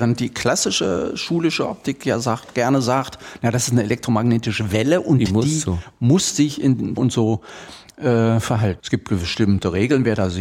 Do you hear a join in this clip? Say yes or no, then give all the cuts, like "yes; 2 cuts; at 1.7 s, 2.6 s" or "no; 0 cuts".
yes; 2 cuts; at 7.0 s, 8.8 s